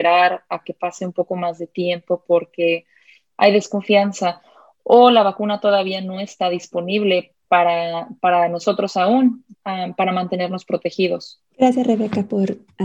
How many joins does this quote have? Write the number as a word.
one